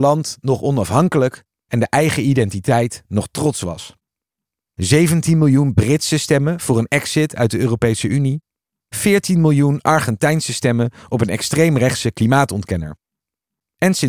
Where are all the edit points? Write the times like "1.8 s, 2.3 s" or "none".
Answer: 4.7 s